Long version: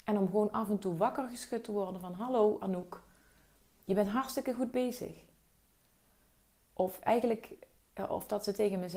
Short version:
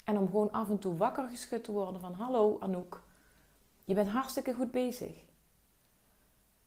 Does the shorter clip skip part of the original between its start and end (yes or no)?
no